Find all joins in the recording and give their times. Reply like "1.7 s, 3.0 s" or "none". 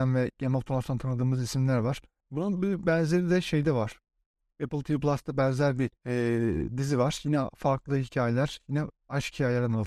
2.2 s, 6.0 s